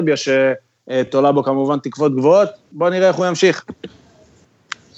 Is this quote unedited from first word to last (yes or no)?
yes